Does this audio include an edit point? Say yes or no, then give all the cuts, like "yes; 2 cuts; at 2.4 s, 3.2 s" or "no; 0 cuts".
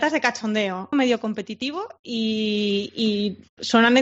yes; 1 cut; at 0.9 s